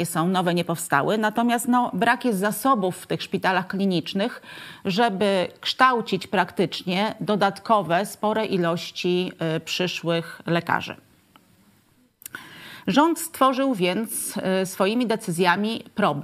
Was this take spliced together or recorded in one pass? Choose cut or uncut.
uncut